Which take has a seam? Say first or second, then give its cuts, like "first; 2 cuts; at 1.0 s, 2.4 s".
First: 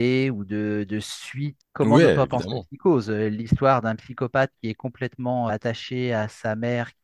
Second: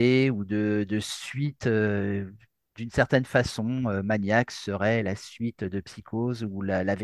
first; 2 cuts; at 1.6 s, 5.5 s